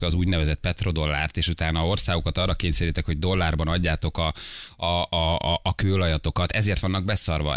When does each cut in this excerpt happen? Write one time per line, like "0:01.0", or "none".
none

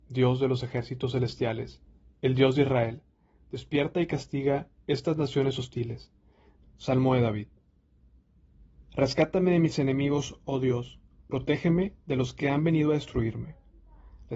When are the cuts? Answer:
0:06.6

